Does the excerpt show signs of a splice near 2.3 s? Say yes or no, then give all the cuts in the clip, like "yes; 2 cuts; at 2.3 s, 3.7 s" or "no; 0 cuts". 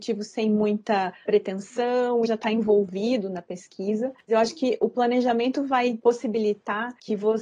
yes; 1 cut; at 2.3 s